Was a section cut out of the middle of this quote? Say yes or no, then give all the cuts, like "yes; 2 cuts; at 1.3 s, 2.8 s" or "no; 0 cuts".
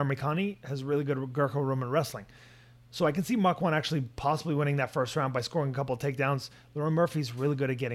no; 0 cuts